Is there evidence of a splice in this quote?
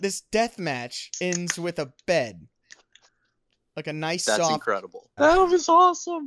yes; 1 cut; at 5.2 s

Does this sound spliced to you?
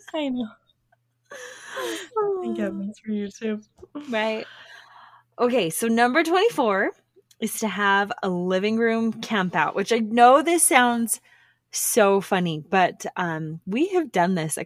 no; 0 cuts

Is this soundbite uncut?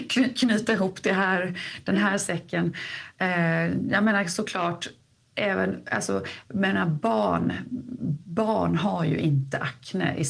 yes; 0 cuts

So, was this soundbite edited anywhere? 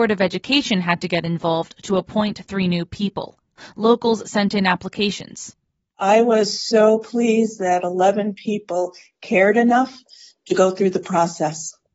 no; 0 cuts

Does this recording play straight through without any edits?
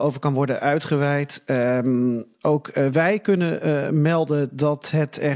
yes; 0 cuts

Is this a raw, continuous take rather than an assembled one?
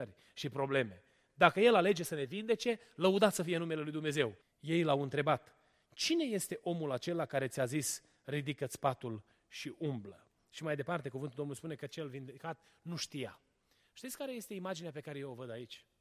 no; 1 cut; at 4.4 s

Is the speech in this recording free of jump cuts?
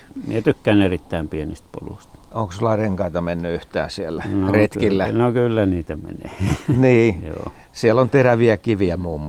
yes; 0 cuts

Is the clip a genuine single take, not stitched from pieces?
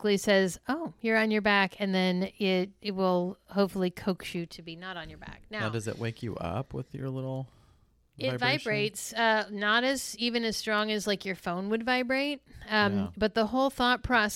yes; 0 cuts

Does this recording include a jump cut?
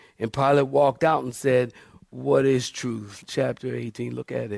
yes; 1 cut; at 3.2 s

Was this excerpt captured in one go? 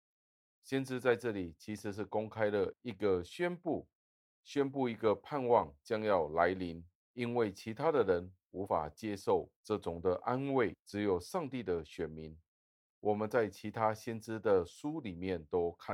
no; 1 cut; at 7.0 s

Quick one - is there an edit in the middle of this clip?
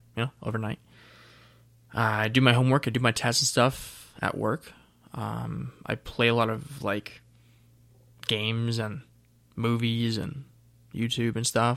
no; 0 cuts

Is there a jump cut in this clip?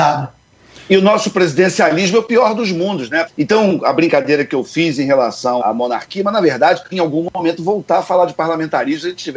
yes; 3 cuts; at 3.3 s, 5.6 s, 6.9 s

